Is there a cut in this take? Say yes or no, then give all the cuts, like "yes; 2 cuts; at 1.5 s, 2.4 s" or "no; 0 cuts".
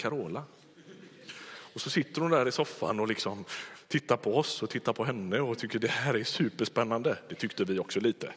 no; 0 cuts